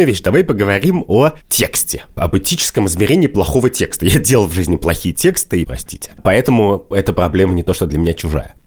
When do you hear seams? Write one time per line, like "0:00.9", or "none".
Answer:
0:05.6